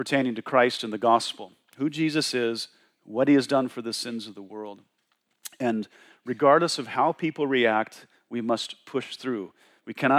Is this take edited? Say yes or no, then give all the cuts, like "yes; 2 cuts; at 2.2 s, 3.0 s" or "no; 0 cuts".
no; 0 cuts